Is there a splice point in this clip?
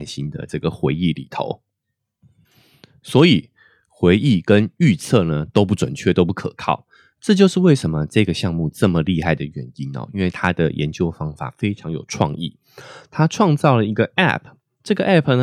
no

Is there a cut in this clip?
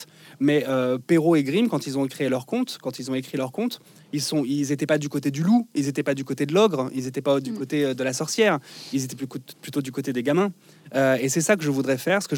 no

